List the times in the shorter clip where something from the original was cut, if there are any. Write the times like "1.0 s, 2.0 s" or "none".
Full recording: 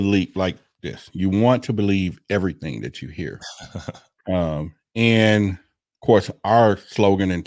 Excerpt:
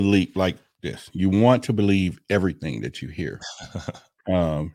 none